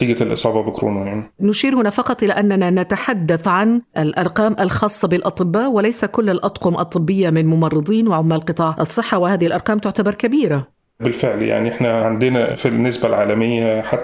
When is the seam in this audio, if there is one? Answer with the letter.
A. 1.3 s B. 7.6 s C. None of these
A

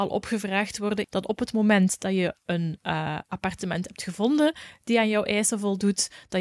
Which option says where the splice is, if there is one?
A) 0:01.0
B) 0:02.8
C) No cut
A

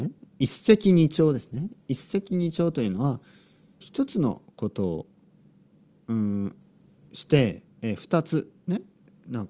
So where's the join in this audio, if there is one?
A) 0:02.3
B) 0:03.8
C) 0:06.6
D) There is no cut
B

